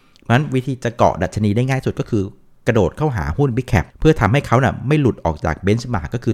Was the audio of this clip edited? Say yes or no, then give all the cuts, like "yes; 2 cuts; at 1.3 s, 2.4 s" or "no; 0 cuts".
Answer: yes; 1 cut; at 3.9 s